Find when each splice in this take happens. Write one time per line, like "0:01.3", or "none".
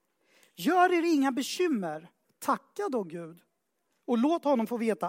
0:02.2